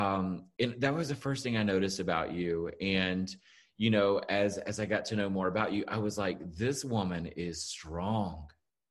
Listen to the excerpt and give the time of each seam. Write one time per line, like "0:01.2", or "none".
none